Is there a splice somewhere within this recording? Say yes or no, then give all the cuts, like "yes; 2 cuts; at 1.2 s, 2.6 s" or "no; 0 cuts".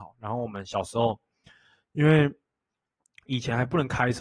no; 0 cuts